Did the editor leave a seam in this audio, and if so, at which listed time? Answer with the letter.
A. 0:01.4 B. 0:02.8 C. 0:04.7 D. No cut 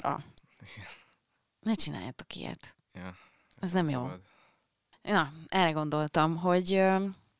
D